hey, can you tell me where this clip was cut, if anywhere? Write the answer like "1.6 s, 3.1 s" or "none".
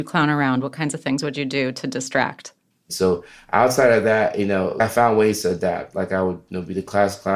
2.9 s